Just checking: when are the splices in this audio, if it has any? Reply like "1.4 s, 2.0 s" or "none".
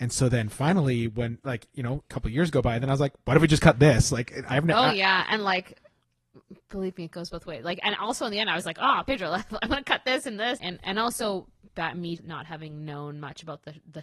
10.6 s, 12.2 s